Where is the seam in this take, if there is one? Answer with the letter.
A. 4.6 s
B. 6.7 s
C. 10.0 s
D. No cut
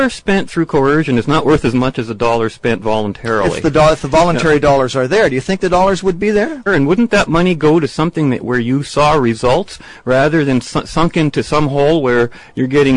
B